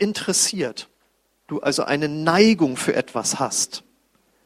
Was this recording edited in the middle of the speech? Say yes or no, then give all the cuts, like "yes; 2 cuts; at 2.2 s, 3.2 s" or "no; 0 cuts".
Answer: no; 0 cuts